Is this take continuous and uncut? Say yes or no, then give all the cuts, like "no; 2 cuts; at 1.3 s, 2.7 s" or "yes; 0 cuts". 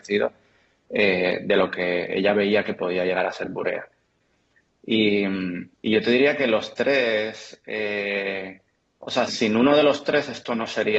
no; 2 cuts; at 5.7 s, 9.3 s